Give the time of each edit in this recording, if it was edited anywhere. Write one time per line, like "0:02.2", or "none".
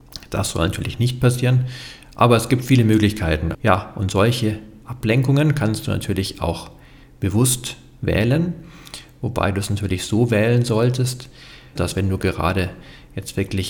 0:03.5
0:11.8